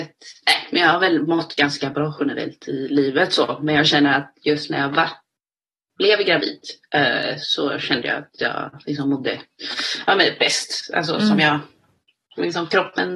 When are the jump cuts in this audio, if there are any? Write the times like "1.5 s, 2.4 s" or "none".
none

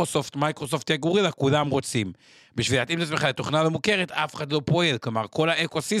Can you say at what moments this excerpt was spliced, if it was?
none

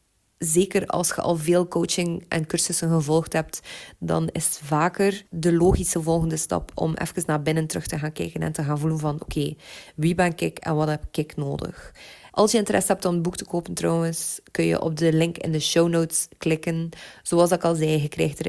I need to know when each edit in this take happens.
5.3 s, 12.3 s

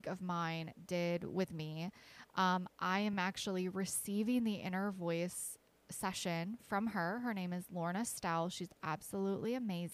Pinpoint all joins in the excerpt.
none

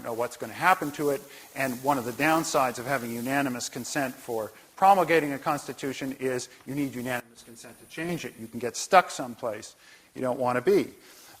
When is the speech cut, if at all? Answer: none

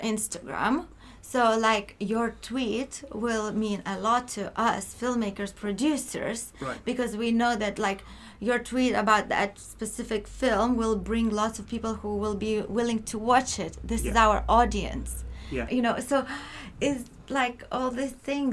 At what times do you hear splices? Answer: 15.7 s

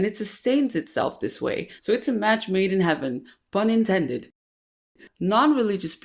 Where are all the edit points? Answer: 1.8 s

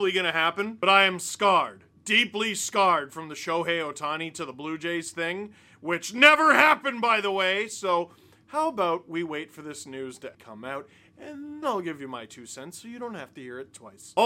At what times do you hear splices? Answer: 10.3 s, 11.6 s

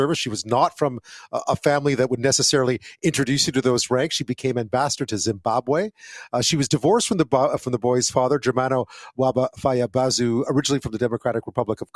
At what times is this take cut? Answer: 4.1 s, 10.5 s

